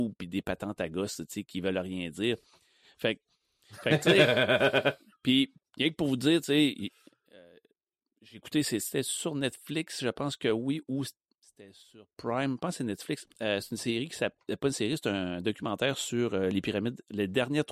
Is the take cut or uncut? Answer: uncut